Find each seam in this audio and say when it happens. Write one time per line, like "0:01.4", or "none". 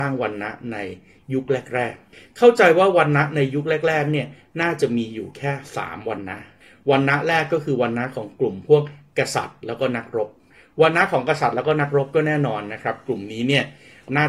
none